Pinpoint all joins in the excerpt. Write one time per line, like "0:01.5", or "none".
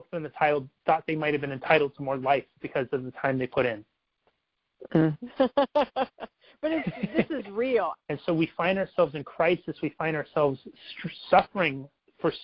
0:05.1
0:07.9